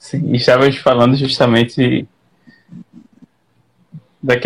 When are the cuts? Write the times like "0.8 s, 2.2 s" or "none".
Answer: none